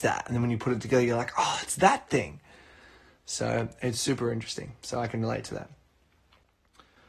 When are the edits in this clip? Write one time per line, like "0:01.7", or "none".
none